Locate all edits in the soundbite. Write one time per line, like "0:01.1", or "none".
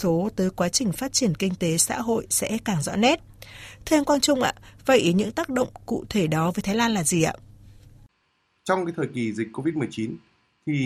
0:08.6